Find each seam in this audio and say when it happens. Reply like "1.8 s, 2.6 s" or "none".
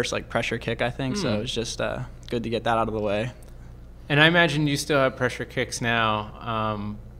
none